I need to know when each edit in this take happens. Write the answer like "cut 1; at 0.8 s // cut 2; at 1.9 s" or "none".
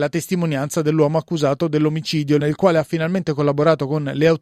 cut 1; at 2.4 s